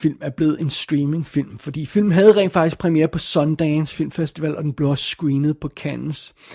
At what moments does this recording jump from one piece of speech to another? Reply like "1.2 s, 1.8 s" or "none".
none